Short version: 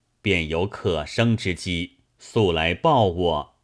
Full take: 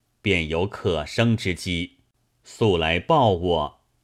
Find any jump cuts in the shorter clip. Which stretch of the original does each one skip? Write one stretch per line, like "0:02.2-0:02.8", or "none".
0:02.1-0:02.3